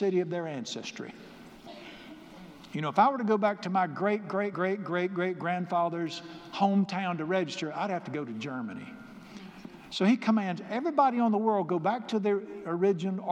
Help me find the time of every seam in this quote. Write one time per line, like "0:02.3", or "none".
0:04.5